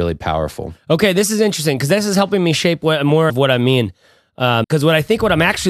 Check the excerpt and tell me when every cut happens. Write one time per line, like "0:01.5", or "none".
0:03.3
0:04.6